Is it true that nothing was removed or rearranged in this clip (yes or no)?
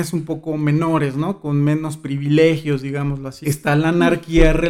no